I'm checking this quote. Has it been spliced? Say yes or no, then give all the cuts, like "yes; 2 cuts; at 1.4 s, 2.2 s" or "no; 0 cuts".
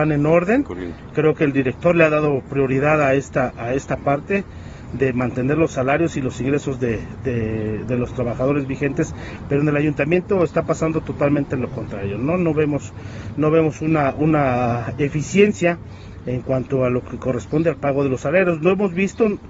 no; 0 cuts